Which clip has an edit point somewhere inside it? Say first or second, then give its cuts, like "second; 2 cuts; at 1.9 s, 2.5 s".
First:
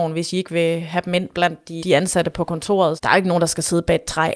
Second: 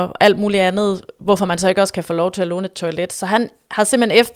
first; 2 cuts; at 1.8 s, 3.0 s